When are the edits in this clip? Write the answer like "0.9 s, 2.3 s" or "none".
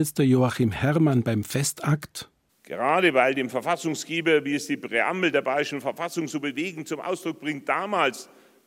none